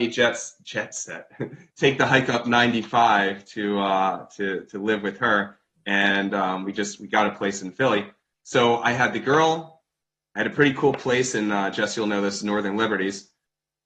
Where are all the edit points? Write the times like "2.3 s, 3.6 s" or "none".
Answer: none